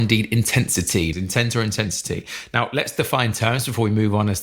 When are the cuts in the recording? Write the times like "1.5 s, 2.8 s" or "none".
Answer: 1.1 s

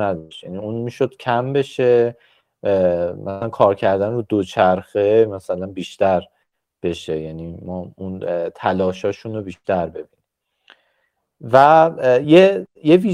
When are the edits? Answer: none

